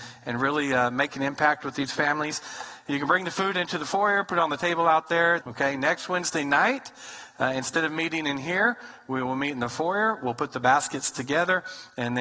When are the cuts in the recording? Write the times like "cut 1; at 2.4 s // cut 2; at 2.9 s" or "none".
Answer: cut 1; at 5.4 s